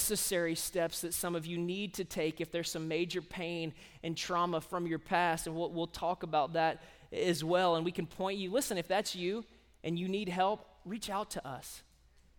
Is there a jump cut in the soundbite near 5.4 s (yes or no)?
no